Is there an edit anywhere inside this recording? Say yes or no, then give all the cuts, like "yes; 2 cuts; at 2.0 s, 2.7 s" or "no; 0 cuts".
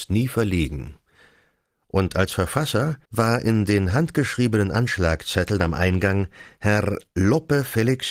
yes; 1 cut; at 3.0 s